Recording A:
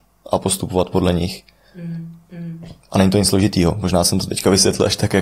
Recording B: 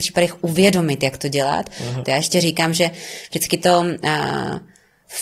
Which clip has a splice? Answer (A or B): B